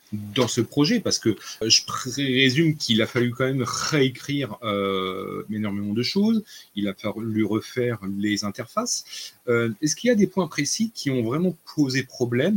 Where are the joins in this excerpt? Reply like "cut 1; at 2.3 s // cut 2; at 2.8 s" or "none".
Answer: cut 1; at 1.6 s